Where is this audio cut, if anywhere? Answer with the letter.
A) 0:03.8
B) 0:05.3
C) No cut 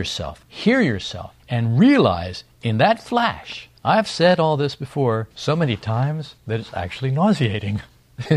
A